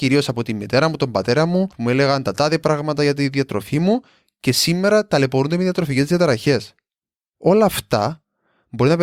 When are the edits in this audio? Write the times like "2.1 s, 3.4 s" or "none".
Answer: 1.7 s, 7.3 s